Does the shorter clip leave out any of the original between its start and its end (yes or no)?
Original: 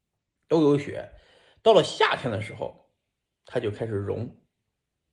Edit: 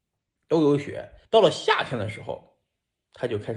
yes